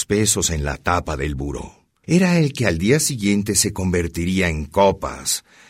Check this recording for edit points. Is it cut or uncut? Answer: cut